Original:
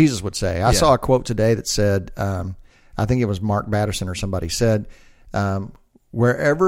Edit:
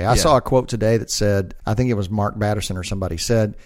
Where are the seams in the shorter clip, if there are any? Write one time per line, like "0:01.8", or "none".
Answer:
0:01.6